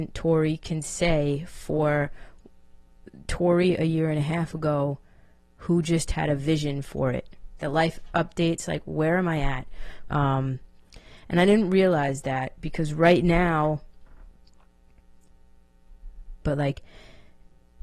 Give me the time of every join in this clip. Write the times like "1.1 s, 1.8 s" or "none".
7.6 s, 10.1 s, 16.4 s